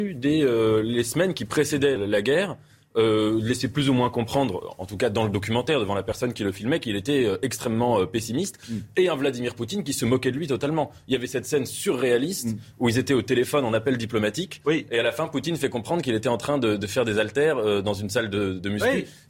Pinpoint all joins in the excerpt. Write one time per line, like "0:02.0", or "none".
0:02.0